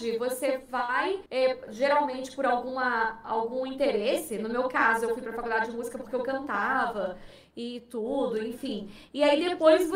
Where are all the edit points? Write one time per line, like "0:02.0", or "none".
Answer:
0:01.3